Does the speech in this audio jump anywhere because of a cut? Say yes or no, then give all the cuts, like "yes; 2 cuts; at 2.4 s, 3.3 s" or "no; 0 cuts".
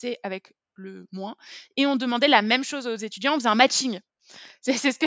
no; 0 cuts